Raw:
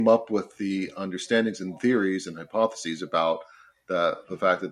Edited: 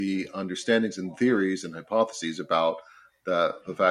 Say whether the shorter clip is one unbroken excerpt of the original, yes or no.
yes